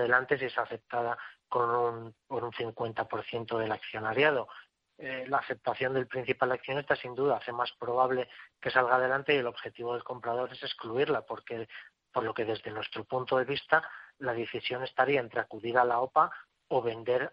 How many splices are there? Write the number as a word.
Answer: zero